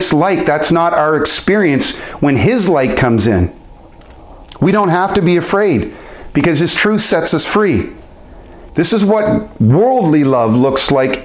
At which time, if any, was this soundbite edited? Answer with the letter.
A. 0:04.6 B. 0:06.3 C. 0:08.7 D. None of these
C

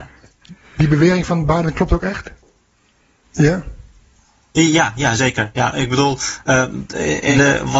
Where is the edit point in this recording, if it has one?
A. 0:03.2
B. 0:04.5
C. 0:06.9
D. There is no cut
A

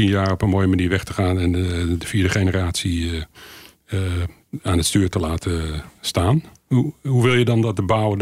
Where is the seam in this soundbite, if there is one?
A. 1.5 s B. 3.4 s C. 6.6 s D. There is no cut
D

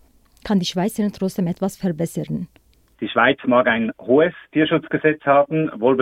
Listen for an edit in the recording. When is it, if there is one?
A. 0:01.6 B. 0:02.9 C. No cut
B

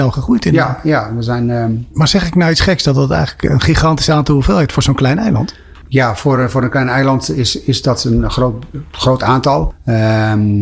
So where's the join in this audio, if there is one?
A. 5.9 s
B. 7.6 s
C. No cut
C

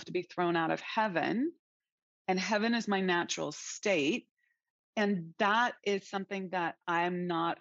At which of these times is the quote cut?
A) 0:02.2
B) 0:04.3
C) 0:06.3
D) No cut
D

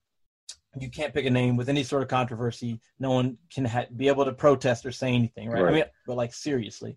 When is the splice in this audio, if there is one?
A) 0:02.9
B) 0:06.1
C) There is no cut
B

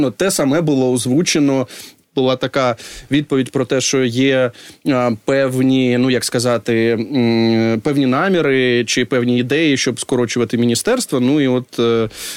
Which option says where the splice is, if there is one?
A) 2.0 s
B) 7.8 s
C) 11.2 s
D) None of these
A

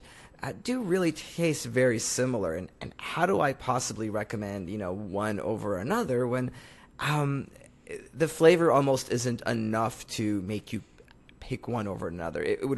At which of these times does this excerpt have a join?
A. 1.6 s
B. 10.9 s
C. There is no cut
C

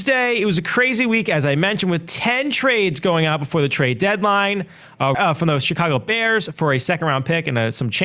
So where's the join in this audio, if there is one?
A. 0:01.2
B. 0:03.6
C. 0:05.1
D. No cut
C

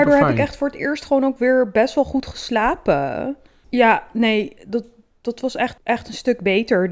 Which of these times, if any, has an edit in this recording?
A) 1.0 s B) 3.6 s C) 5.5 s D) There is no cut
B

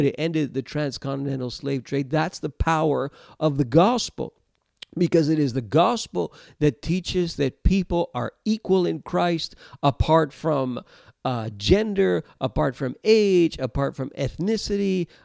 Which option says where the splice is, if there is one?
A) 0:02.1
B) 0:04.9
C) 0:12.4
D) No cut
D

